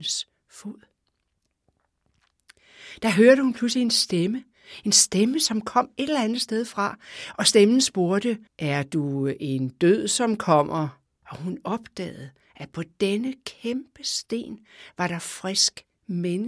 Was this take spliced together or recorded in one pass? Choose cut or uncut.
cut